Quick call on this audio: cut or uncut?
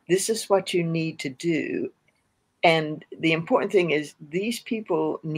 uncut